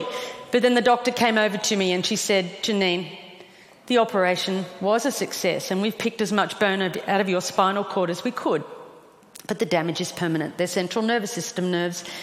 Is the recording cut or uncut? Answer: uncut